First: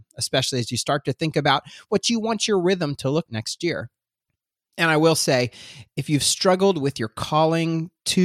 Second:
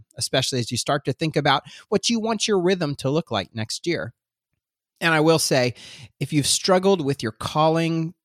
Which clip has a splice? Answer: first; 1 cut; at 3.3 s

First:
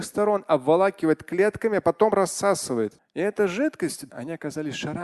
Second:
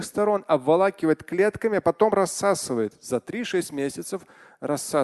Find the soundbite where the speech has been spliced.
first; 2 cuts; at 3.0 s, 4.1 s

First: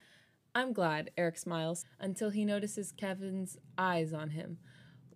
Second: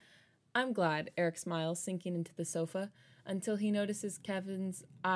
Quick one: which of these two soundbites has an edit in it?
first; 1 cut; at 1.8 s

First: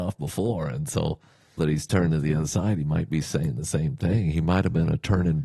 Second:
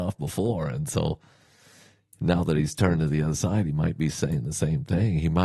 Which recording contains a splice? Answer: first; 1 cut; at 1.6 s

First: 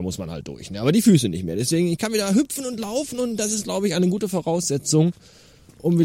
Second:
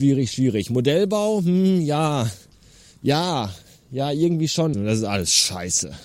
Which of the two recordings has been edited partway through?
second; 1 cut; at 4.7 s

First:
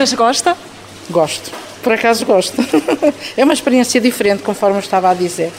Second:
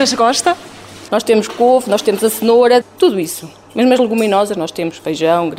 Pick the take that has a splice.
second; 2 cuts; at 1.1 s, 2.8 s

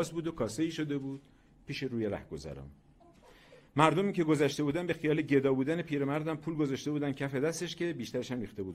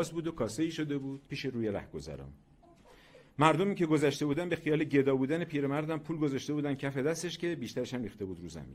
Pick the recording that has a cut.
second; 1 cut; at 1.3 s

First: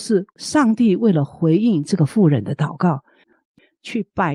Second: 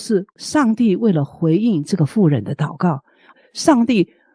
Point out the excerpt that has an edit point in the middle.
first; 1 cut; at 3.2 s

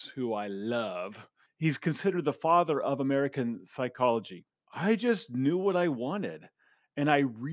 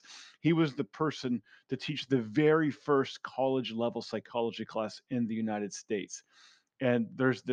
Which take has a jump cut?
first; 2 cuts; at 1.5 s, 4.5 s

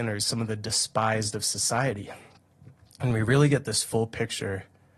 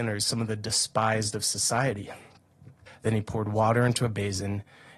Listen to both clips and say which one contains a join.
second; 1 cut; at 2.9 s

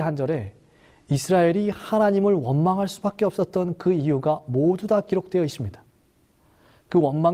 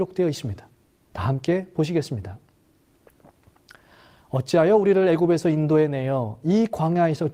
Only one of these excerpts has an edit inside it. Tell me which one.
second; 1 cut; at 1.0 s

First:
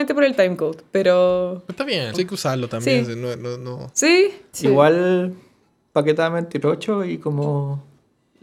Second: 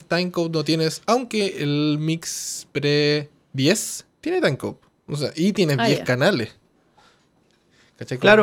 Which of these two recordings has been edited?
first; 3 cuts; at 2.1 s, 4.5 s, 6.6 s

